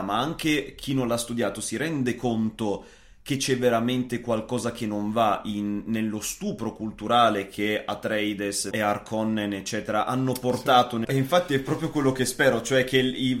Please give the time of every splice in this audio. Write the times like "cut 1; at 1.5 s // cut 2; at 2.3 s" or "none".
cut 1; at 8.7 s // cut 2; at 11.0 s

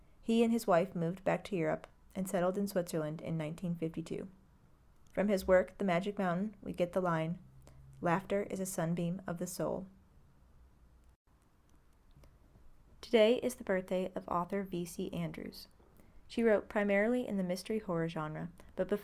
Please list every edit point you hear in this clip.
cut 1; at 5.1 s

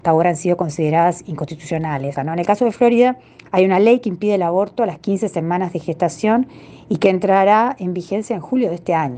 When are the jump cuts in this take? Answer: cut 1; at 2.2 s

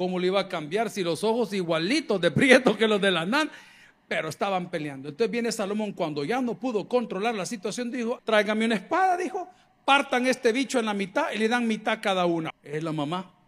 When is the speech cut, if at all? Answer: cut 1; at 8.2 s // cut 2; at 12.5 s

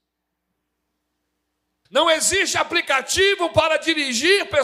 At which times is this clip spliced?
cut 1; at 1.9 s

